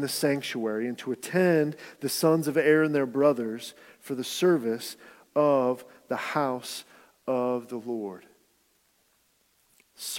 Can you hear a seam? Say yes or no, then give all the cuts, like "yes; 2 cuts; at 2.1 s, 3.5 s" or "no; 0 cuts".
no; 0 cuts